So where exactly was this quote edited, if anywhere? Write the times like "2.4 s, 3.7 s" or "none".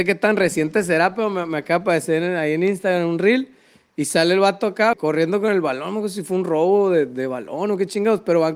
4.9 s